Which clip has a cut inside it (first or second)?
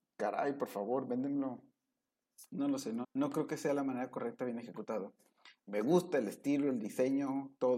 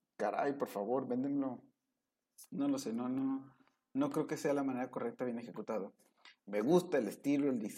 first